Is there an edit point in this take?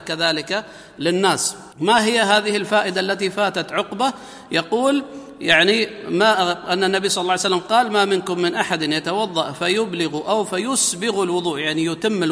yes; 1 cut; at 1.7 s

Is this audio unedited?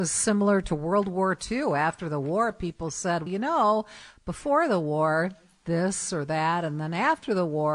no; 1 cut; at 3.3 s

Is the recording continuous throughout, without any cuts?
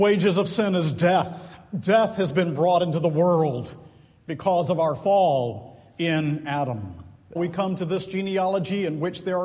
no; 1 cut; at 7.4 s

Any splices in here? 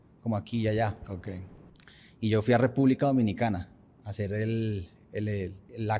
no; 0 cuts

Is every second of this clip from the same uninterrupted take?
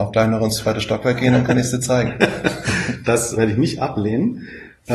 no; 1 cut; at 3.4 s

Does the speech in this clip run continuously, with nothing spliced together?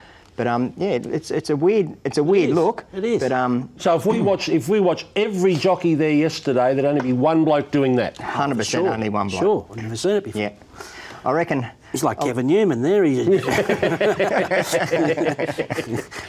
yes; 0 cuts

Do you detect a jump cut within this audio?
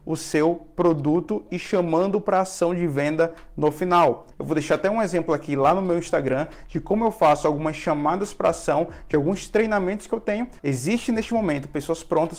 yes; 2 cuts; at 4.3 s, 10.6 s

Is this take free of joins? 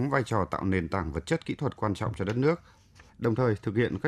no; 1 cut; at 3.1 s

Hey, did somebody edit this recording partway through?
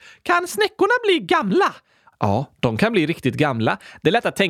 no; 0 cuts

